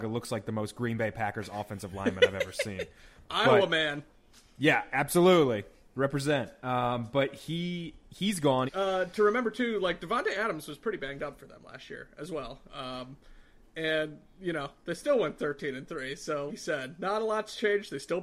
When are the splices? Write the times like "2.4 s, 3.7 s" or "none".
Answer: 8.7 s, 12.7 s, 16.5 s